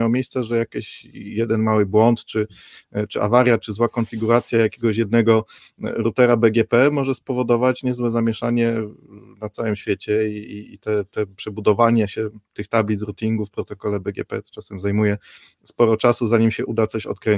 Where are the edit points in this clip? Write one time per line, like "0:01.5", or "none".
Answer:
none

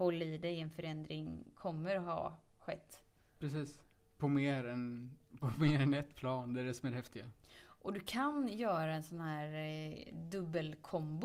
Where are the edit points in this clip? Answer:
none

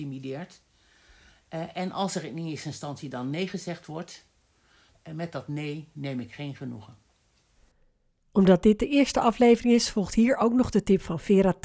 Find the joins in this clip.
0:04.9

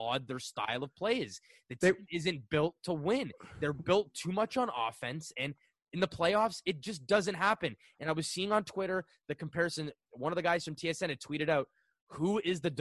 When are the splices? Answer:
none

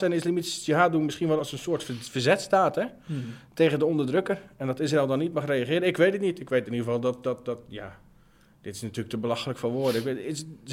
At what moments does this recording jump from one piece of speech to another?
0:01.4

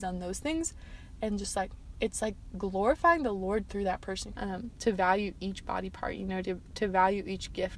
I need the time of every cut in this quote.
0:04.4

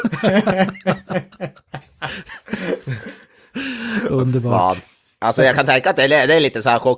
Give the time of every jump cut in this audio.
none

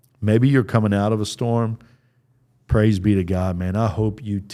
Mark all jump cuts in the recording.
none

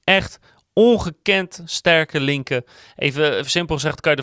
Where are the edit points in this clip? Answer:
none

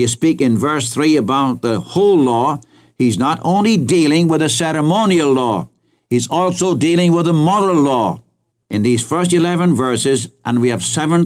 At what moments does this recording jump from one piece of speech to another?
0:08.6

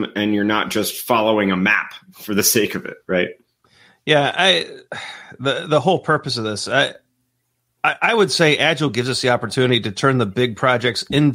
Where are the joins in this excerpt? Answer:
none

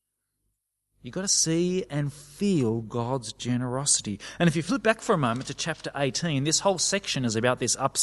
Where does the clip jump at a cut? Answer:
none

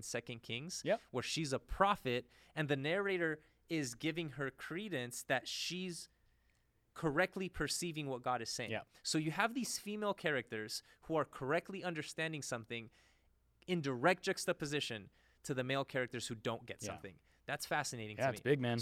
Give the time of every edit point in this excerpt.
none

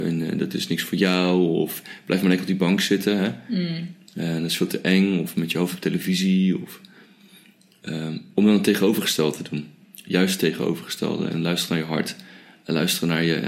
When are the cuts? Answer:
0:09.8

